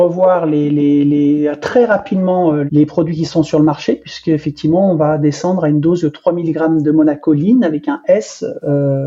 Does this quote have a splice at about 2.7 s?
yes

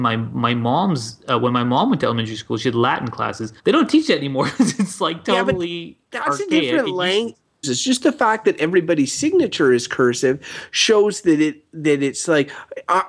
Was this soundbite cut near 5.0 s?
no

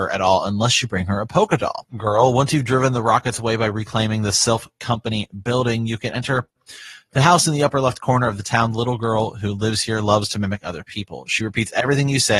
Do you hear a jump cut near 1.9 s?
yes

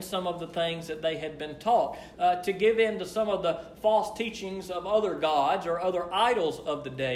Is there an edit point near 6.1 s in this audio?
no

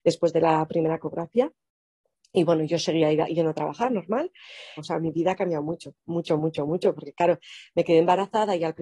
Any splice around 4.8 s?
yes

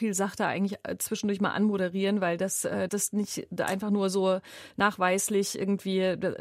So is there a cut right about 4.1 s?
no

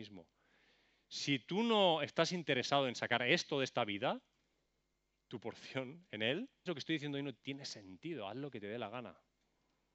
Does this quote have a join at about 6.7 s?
yes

